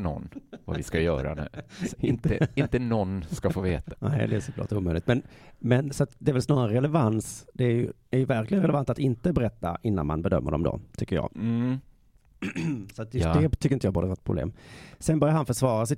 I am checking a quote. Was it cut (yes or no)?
yes